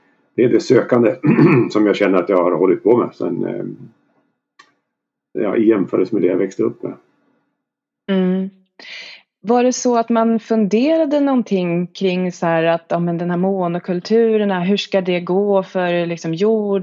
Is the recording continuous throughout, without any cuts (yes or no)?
no